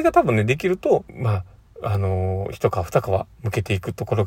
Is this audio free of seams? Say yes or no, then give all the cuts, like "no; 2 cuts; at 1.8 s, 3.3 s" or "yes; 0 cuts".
no; 1 cut; at 1.1 s